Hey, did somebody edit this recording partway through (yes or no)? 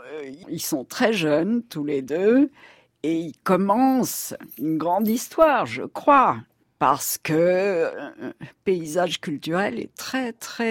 yes